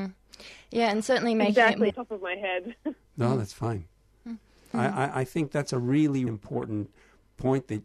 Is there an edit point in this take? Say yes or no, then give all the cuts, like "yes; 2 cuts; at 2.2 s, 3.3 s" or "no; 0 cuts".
yes; 3 cuts; at 1.9 s, 4.7 s, 6.3 s